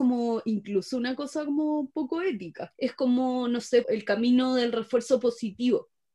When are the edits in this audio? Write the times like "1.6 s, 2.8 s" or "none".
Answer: 2.8 s, 3.8 s